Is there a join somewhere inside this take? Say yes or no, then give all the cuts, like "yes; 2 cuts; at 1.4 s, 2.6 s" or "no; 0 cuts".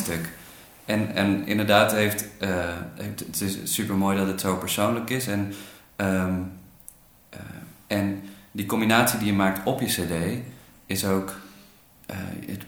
no; 0 cuts